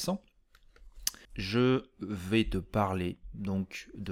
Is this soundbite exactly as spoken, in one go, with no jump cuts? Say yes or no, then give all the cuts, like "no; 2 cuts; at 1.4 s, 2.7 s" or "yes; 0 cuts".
no; 1 cut; at 1.2 s